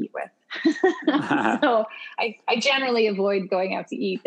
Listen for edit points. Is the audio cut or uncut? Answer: uncut